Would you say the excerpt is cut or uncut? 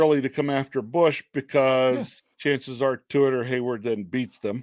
cut